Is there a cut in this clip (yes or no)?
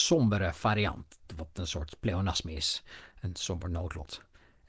no